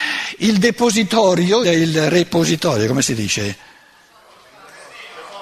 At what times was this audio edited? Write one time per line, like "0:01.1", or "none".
0:01.6